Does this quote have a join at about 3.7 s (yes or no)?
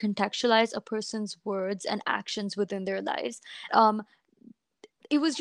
yes